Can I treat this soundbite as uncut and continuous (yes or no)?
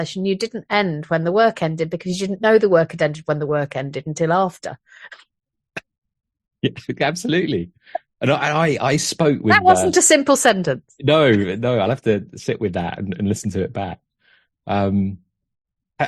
yes